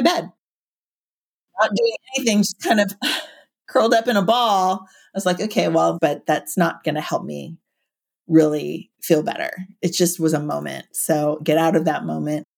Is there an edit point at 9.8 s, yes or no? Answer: no